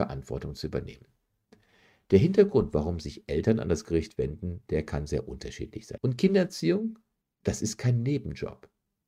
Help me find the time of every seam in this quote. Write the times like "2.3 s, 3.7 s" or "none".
6.0 s